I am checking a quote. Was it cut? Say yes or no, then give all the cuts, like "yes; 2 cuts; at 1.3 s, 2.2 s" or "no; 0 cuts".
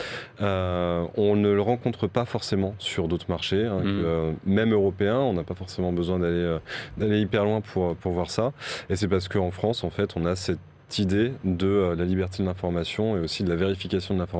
no; 0 cuts